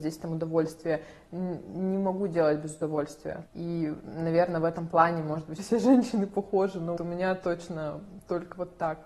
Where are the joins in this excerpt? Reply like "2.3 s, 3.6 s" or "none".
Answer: 3.5 s, 5.6 s, 7.0 s